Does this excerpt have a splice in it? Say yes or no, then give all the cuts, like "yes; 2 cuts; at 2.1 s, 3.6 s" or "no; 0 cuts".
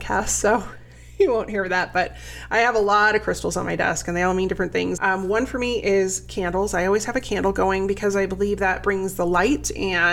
yes; 1 cut; at 5.0 s